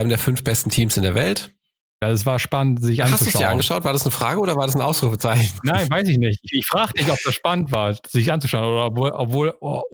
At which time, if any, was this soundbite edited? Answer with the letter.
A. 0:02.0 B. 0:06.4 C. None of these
A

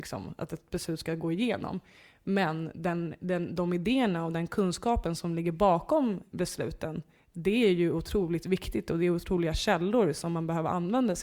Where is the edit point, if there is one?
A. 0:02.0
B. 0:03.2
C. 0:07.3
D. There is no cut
D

